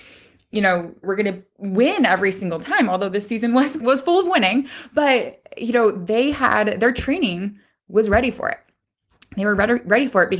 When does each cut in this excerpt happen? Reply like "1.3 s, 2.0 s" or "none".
1.0 s, 3.8 s